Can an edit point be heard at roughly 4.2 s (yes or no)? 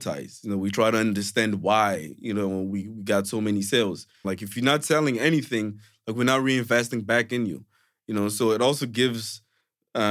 yes